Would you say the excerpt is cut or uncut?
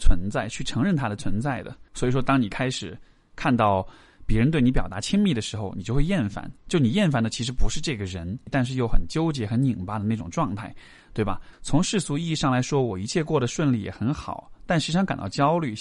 cut